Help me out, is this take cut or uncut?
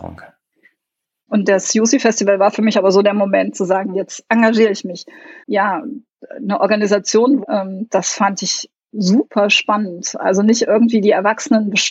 cut